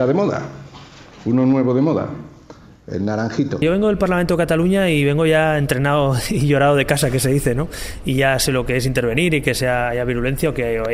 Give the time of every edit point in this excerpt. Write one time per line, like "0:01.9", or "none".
none

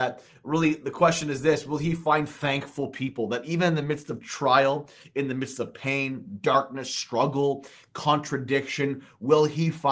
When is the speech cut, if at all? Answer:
none

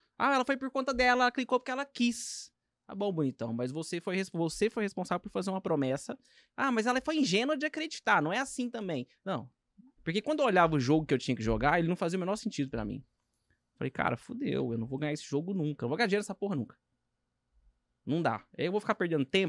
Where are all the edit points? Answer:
0:10.0

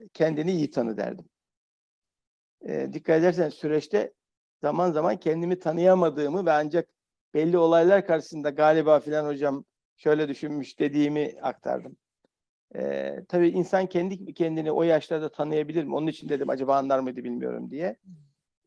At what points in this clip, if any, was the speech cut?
none

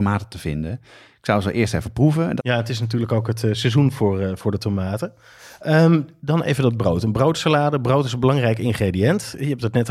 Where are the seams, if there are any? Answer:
0:02.4

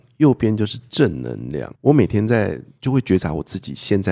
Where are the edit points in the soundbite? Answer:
0:01.8

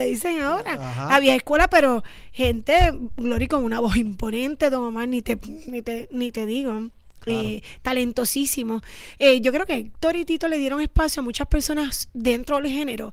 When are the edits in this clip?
none

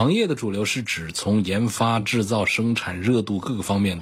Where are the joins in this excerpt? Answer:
none

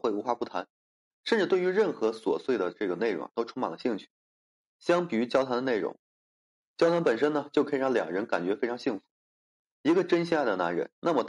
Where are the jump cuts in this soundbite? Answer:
none

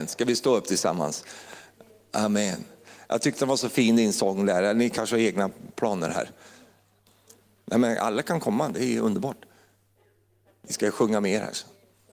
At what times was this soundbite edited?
none

